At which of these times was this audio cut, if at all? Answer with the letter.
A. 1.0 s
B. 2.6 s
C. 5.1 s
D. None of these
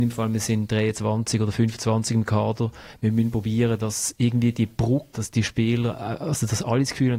C